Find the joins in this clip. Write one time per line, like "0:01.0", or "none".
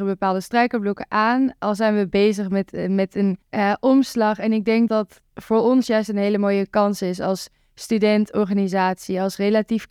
0:03.4
0:04.9